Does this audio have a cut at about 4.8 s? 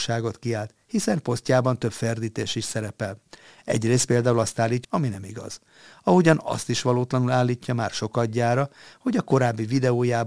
yes; 1 cut; at 4.8 s

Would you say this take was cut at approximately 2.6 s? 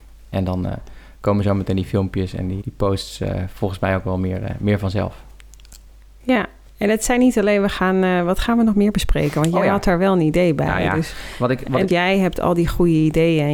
yes; 2 cuts; at 2.6 s, 11.9 s

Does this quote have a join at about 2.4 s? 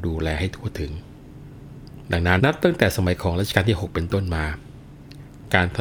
yes; 1 cut; at 2.4 s

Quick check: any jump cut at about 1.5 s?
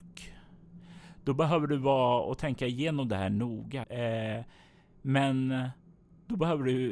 no; 1 cut; at 3.8 s

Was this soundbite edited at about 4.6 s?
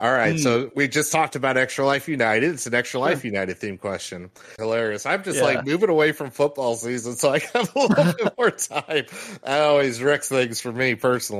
yes; 1 cut; at 4.6 s

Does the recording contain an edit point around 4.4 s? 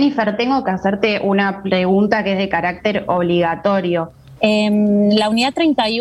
yes; 1 cut; at 4.4 s

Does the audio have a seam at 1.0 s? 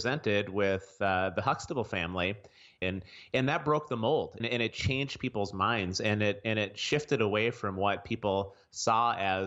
no; 2 cuts; at 2.8 s, 4.4 s

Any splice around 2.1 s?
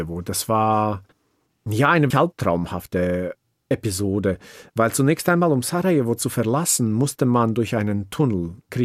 yes; 1 cut; at 2.1 s

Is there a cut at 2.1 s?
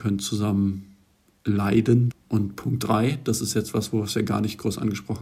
yes; 1 cut; at 2.1 s

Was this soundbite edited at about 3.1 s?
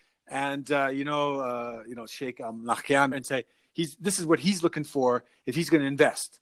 yes; 1 cut; at 3.1 s

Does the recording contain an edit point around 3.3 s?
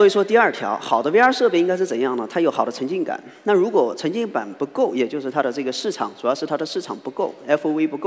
no; 0 cuts

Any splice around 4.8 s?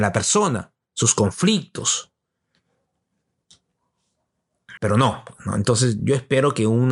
yes; 1 cut; at 4.8 s

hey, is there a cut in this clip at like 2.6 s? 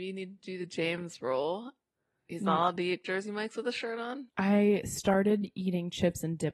no; 1 cut; at 4.3 s

